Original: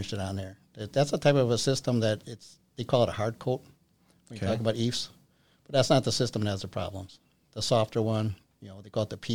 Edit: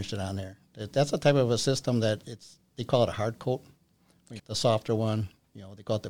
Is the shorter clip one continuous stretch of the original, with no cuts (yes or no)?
no